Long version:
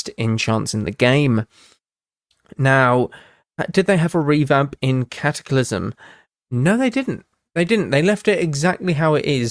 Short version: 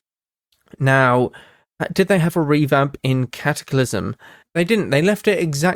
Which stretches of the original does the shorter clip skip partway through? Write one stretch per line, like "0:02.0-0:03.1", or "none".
0:06.2-0:07.4